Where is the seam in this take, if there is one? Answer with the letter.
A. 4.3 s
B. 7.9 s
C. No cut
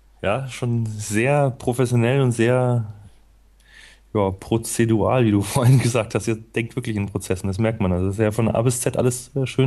C